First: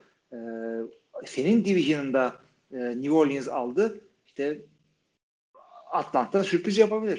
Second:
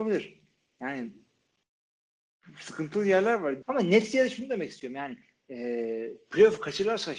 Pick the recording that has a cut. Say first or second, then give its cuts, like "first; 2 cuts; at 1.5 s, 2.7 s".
second; 1 cut; at 3.6 s